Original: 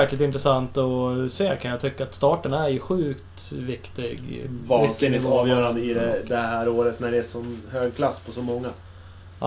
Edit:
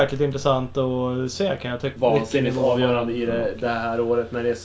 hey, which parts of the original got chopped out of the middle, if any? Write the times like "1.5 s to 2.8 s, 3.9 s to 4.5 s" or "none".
2.0 s to 4.6 s